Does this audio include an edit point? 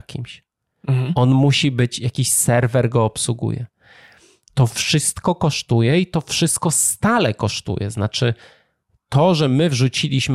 no; 0 cuts

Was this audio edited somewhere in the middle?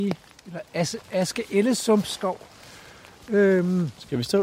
no; 0 cuts

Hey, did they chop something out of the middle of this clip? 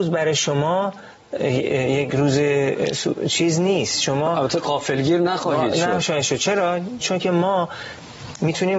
yes; 1 cut; at 7.0 s

